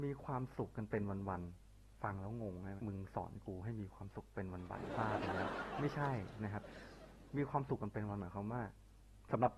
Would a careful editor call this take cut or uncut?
cut